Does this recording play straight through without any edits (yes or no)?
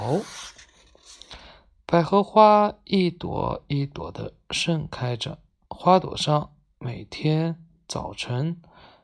no